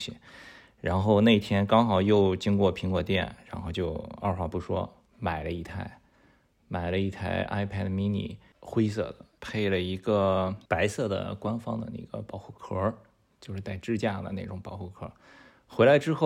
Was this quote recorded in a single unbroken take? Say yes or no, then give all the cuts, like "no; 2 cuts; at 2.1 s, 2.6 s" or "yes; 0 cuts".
no; 3 cuts; at 5.1 s, 9.4 s, 10.7 s